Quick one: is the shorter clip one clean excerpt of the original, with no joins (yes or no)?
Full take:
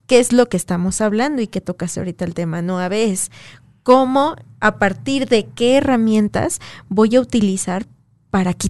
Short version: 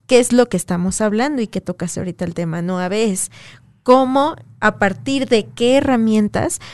yes